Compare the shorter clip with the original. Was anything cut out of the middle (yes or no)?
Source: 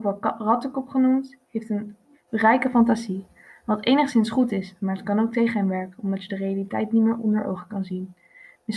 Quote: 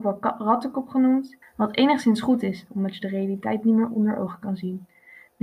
yes